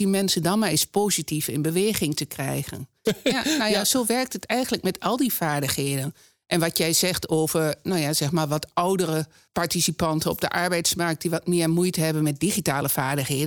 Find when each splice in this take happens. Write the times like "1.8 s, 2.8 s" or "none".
3.1 s